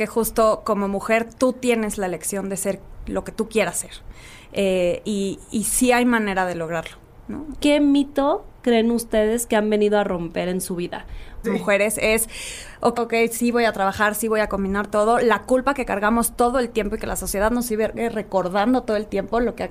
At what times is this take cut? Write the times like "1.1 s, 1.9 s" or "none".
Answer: 7.6 s, 11.4 s, 12.9 s